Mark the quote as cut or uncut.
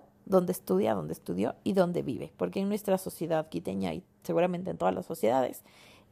uncut